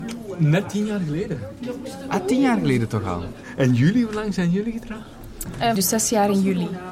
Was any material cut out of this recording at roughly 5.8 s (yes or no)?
yes